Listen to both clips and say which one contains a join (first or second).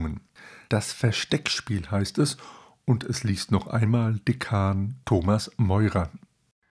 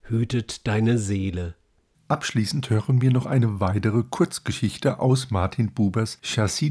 second